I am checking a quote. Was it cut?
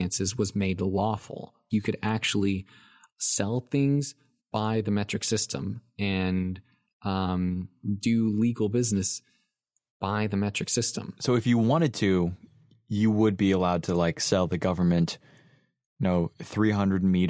yes; 1 cut; at 1.7 s

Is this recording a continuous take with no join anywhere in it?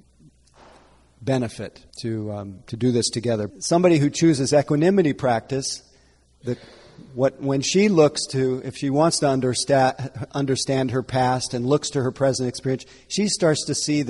no; 2 cuts; at 1.9 s, 3.5 s

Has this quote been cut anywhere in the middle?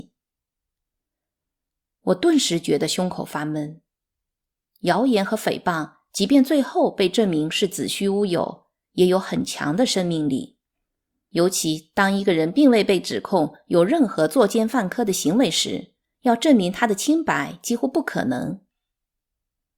no; 0 cuts

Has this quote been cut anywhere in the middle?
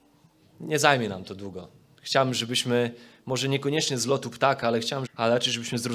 yes; 1 cut; at 5.1 s

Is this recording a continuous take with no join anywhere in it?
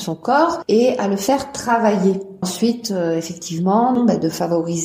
no; 2 cuts; at 2.4 s, 4.0 s

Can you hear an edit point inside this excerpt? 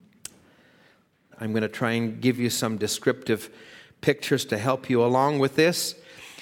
yes; 1 cut; at 1.3 s

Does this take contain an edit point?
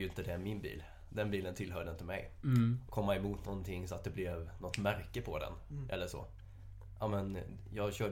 yes; 1 cut; at 2.9 s

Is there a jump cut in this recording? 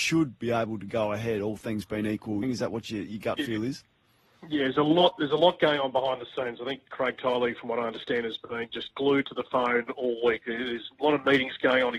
yes; 2 cuts; at 2.4 s, 8.9 s

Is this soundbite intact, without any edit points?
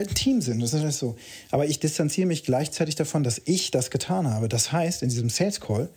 yes; 0 cuts

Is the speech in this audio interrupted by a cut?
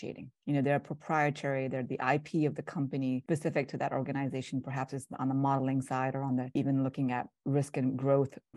no; 0 cuts

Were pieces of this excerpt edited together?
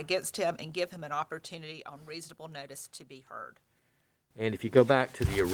yes; 1 cut; at 4.3 s

